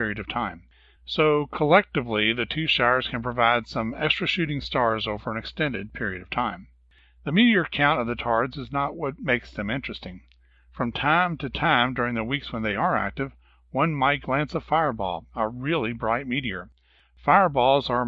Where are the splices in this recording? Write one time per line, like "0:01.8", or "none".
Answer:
0:01.0